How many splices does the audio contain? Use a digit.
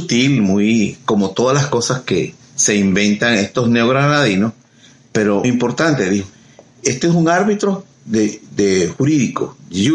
2